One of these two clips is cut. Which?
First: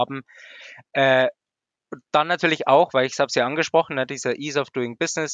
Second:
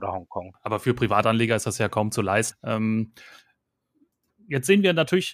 second; 1 cut; at 2.5 s

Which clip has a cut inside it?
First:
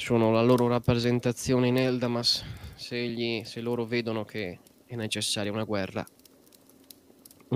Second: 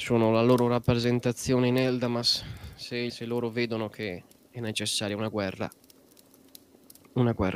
second; 1 cut; at 3.1 s

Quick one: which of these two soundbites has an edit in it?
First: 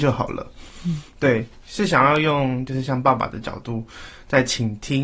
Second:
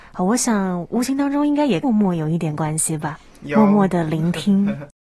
second; 1 cut; at 1.8 s

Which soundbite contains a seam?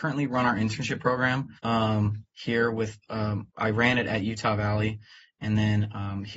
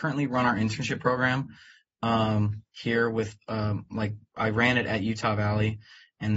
first; 2 cuts; at 1.6 s, 3.5 s

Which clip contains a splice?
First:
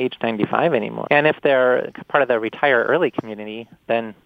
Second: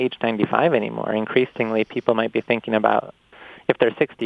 first; 1 cut; at 1.1 s

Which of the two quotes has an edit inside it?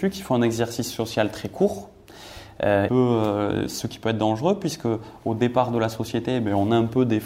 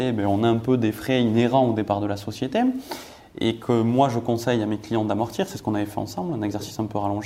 first; 1 cut; at 2.9 s

